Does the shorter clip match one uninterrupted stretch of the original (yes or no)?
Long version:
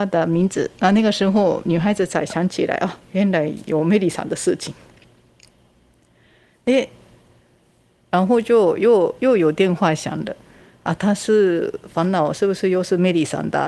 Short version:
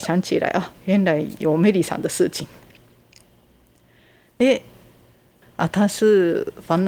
no